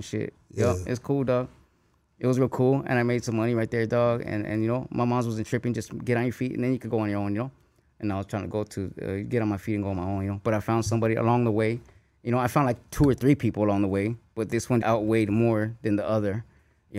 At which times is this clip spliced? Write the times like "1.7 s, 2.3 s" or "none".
14.8 s